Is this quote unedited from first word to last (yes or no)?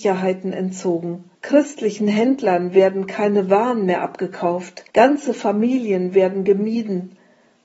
no